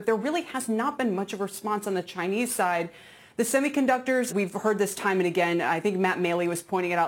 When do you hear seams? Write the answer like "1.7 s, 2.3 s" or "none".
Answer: 4.3 s